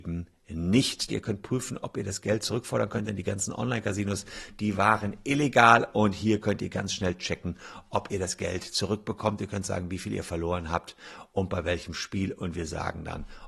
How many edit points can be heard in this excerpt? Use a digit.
1